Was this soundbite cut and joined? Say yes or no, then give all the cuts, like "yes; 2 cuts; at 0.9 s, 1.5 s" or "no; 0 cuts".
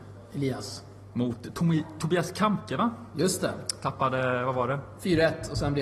no; 0 cuts